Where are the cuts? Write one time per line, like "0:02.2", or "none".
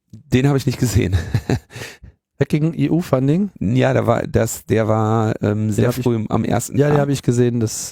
none